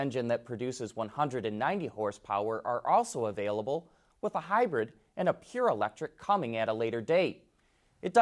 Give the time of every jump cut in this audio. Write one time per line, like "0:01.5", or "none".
none